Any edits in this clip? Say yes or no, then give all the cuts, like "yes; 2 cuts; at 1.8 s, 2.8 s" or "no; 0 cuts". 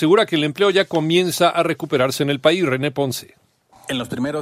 no; 0 cuts